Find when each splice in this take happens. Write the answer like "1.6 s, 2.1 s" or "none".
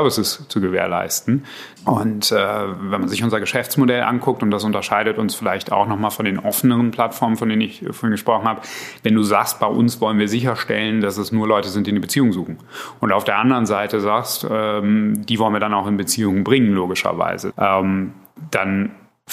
1.8 s, 17.5 s